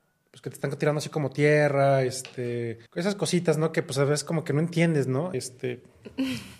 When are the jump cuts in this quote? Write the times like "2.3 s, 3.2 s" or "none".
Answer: 2.9 s, 5.3 s